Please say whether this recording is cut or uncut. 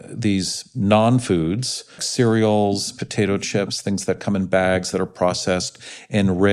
cut